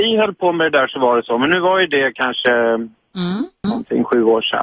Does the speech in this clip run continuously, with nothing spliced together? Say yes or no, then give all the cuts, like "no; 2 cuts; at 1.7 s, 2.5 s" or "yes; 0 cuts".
no; 1 cut; at 3.6 s